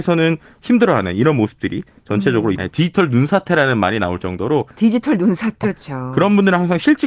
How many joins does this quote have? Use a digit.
2